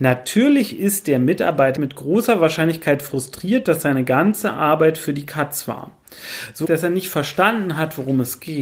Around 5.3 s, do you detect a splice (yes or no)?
no